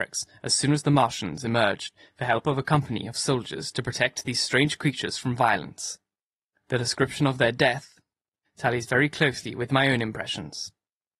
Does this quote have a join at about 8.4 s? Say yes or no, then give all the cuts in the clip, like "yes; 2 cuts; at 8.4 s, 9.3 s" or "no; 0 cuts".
yes; 2 cuts; at 6.5 s, 8.4 s